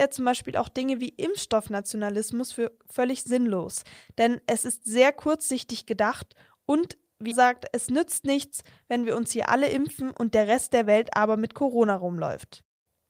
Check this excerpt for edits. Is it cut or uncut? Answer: cut